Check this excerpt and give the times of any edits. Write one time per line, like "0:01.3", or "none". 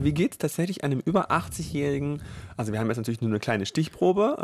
none